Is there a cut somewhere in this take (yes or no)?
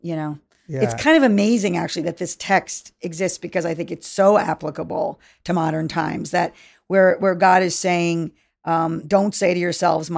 yes